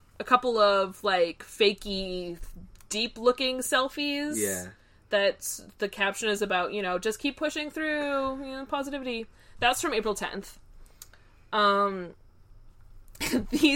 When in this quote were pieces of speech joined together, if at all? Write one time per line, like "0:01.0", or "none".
none